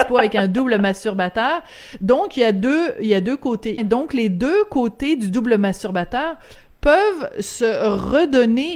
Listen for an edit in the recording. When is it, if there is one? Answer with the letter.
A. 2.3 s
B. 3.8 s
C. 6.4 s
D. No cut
B